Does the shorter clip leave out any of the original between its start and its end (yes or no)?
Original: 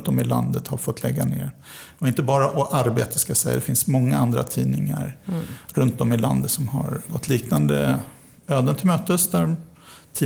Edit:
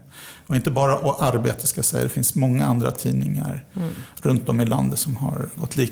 no